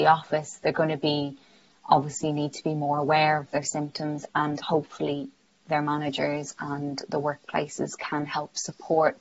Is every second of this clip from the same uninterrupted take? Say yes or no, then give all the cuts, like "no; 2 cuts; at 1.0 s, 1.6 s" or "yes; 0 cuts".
yes; 0 cuts